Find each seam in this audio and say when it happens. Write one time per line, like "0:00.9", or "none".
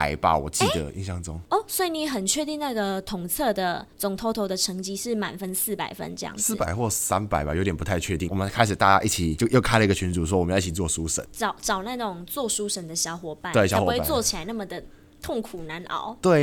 0:01.5
0:08.3
0:11.3

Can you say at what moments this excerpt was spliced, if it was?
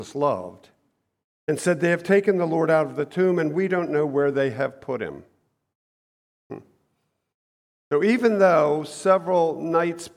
none

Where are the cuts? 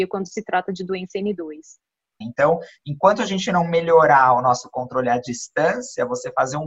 0:02.2

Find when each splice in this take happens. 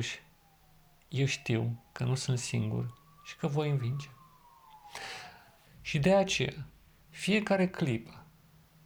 0:05.7
0:07.1

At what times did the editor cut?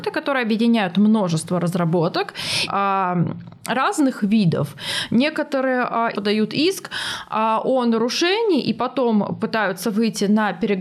0:02.7
0:06.1

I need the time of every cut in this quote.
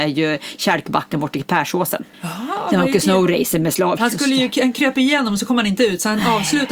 0:02.1
0:04.0

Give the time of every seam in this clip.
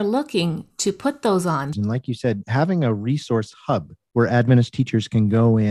0:01.7

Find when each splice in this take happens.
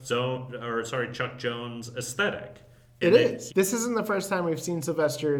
0:03.5

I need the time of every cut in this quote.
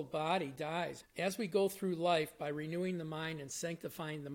0:01.0

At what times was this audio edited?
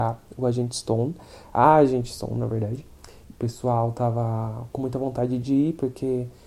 0:03.3
0:04.7

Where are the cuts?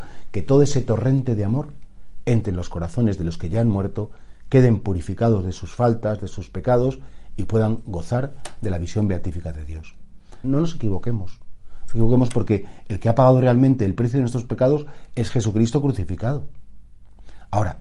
0:10.4

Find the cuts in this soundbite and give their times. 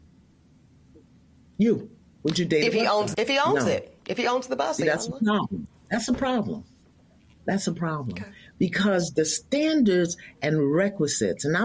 0:03.1

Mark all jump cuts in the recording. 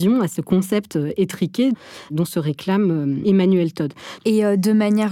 0:04.2

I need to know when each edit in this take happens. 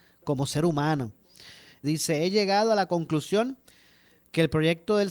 0:01.8

